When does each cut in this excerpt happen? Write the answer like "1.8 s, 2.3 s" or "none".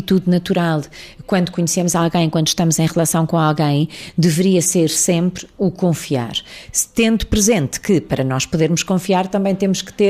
none